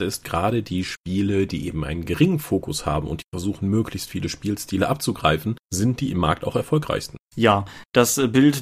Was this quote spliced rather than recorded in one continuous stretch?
no; 0 cuts

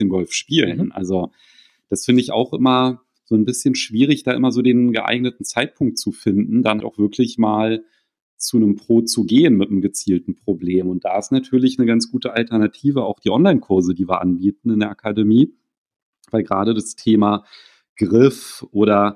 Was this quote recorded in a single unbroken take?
no; 1 cut; at 6.8 s

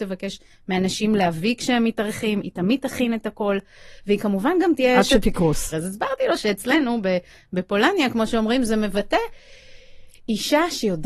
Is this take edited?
yes; 1 cut; at 5.7 s

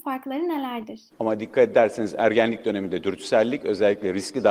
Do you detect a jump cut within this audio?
yes; 1 cut; at 1.1 s

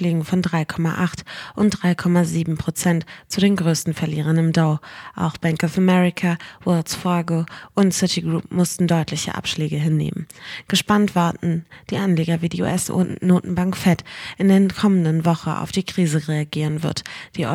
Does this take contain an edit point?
no; 0 cuts

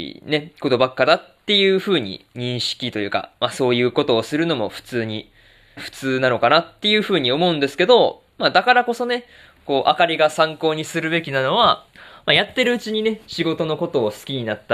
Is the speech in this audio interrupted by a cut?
yes; 1 cut; at 5.8 s

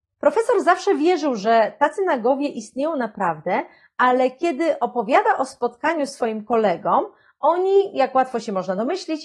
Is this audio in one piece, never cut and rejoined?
yes; 0 cuts

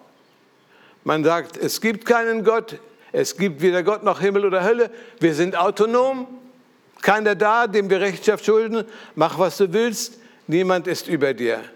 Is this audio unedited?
yes; 0 cuts

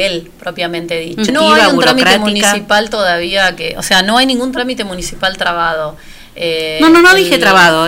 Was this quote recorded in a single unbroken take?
no; 1 cut; at 1.3 s

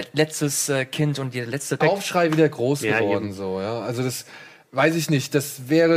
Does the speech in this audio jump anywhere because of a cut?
yes; 1 cut; at 1.8 s

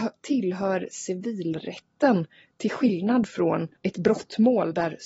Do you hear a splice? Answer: yes; 1 cut; at 3.8 s

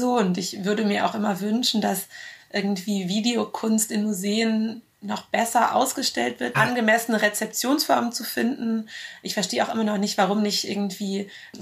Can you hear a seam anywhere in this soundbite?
yes; 1 cut; at 6.5 s

